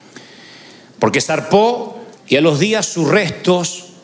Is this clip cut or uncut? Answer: cut